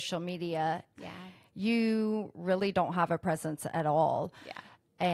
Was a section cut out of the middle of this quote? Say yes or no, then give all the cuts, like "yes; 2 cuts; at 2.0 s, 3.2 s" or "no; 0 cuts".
yes; 1 cut; at 1.0 s